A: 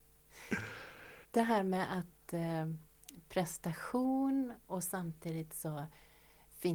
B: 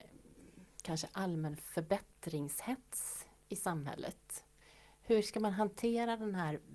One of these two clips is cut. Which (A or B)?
A